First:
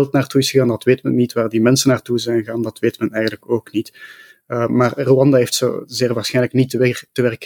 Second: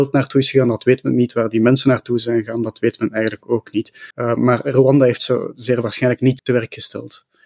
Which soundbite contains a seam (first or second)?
second